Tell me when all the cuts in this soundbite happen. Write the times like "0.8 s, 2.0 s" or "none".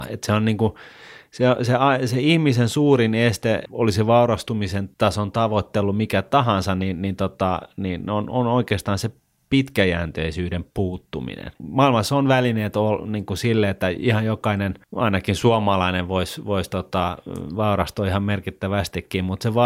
11.6 s